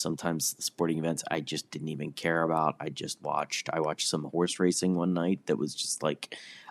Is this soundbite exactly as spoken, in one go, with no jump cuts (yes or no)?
yes